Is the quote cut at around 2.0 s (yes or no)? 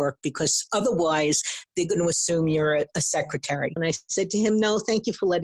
no